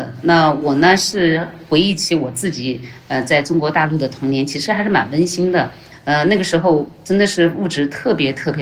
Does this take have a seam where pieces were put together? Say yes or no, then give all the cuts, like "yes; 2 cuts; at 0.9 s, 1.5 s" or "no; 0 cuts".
no; 0 cuts